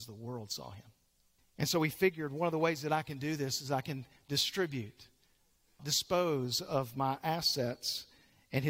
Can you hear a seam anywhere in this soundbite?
yes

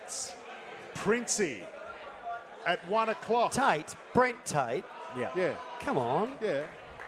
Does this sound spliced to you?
no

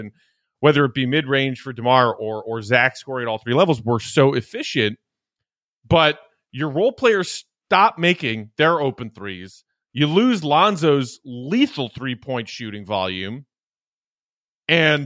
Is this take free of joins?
yes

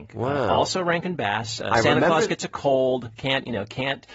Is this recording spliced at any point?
no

